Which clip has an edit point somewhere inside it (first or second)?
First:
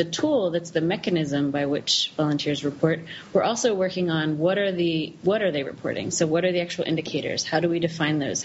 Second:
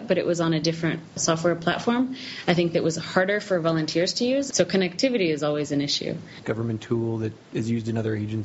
second